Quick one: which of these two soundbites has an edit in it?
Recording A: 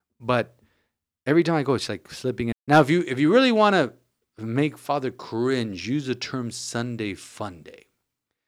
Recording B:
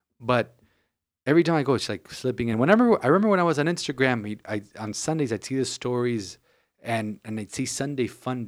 A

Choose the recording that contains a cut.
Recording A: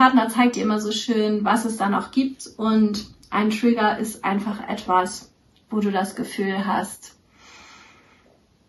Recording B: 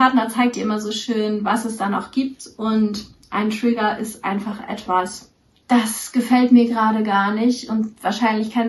B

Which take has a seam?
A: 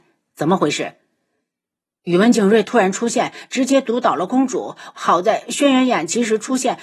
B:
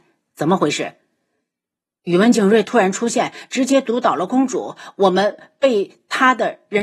A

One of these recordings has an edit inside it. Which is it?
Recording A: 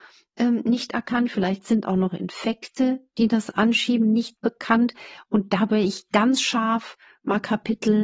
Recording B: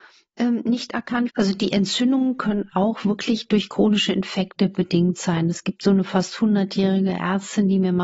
B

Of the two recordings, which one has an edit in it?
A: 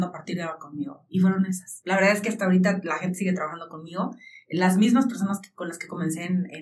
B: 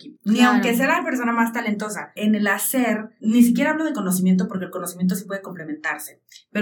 B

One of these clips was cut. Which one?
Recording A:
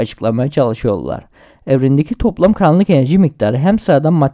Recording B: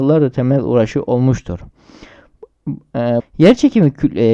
B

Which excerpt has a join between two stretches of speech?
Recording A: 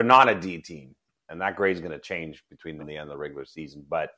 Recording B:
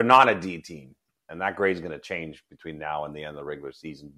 A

